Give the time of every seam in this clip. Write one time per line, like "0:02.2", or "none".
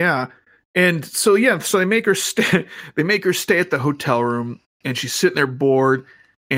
none

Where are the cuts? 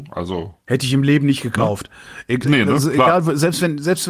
0:02.4

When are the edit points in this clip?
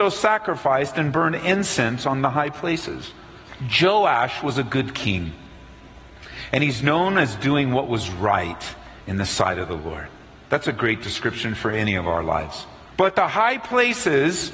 0:09.0
0:12.9

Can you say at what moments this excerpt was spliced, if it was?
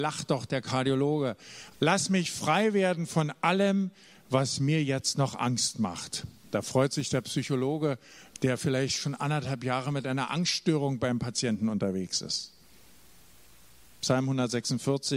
0:01.7

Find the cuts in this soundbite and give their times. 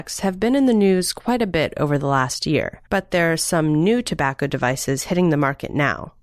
0:02.9

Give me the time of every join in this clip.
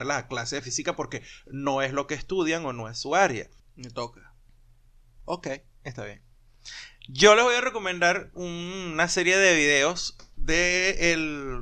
0:03.6

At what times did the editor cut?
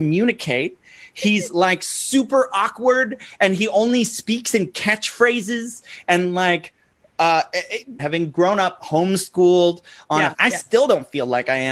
0:08.0
0:10.3

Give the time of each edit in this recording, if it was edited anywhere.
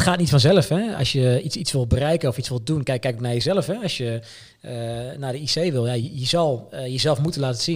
none

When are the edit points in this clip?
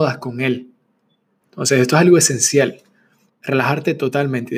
0:01.4
0:03.3

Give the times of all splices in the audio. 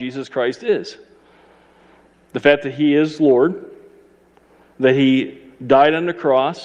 none

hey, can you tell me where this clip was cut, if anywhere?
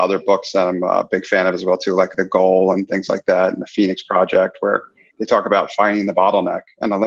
none

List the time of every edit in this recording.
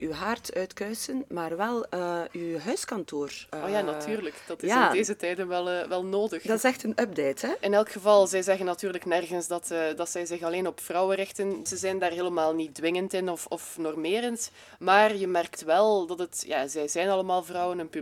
none

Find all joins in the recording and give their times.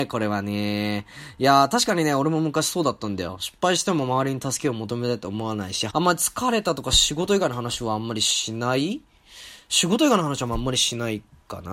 0:05.9

